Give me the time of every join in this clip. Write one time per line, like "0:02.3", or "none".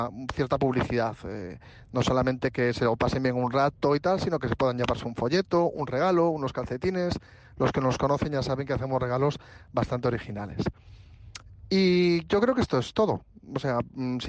none